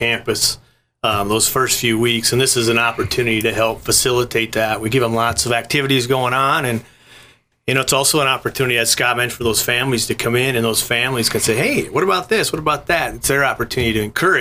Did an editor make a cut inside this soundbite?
no; 0 cuts

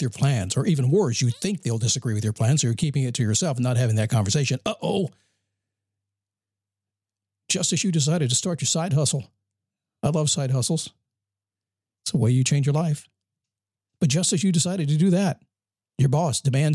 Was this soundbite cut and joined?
no; 0 cuts

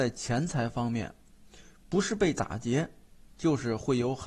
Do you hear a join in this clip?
no; 0 cuts

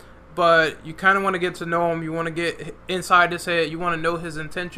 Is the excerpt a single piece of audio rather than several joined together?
yes; 0 cuts

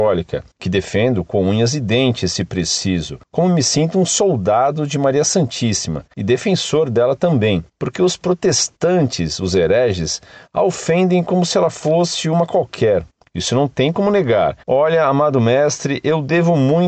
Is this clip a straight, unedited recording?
no; 2 cuts; at 13.3 s, 14.6 s

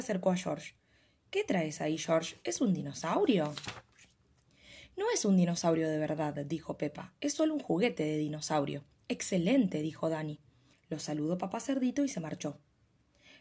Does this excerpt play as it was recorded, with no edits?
no; 1 cut; at 10.7 s

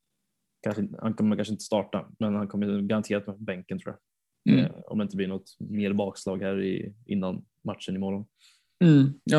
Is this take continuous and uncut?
yes; 0 cuts

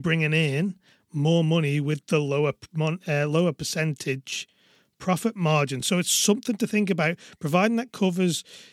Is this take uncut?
yes; 0 cuts

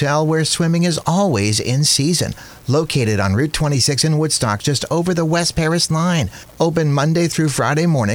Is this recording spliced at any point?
no; 0 cuts

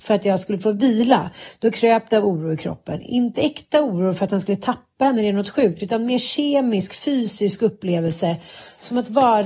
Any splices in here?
no; 0 cuts

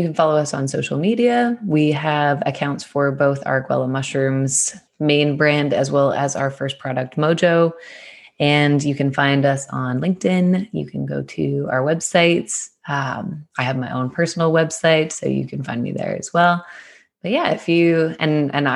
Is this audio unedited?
no; 1 cut; at 4.9 s

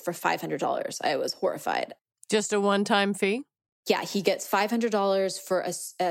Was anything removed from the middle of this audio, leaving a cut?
no; 0 cuts

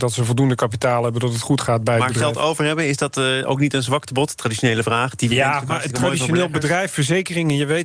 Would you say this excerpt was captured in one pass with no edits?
yes; 0 cuts

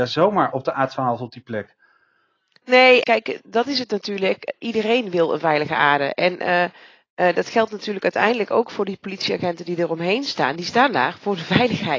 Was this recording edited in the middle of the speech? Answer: yes; 1 cut; at 3.0 s

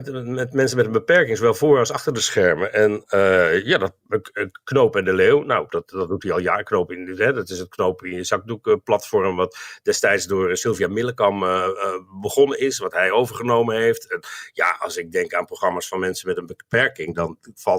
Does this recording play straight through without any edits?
no; 1 cut; at 5.7 s

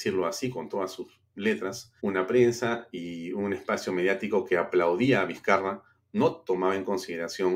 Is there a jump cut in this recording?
yes; 1 cut; at 2.0 s

